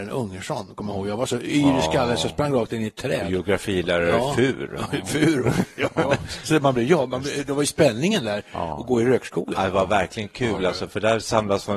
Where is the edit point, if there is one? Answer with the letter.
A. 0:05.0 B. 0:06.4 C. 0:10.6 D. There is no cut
D